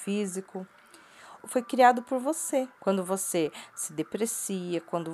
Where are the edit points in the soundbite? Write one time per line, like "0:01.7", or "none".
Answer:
0:01.4
0:02.8